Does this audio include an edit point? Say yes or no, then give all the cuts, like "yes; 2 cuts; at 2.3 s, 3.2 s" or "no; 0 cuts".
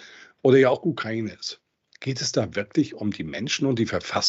no; 0 cuts